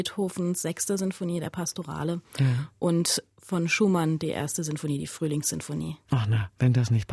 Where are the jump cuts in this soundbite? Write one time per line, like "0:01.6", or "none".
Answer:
none